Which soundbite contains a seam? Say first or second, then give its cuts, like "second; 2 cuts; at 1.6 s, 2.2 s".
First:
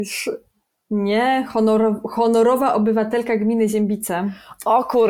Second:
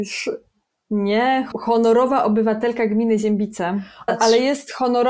second; 2 cuts; at 1.5 s, 4.1 s